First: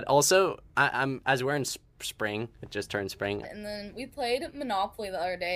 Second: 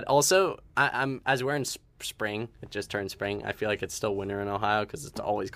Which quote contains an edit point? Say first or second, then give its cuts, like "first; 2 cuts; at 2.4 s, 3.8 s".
first; 1 cut; at 3.4 s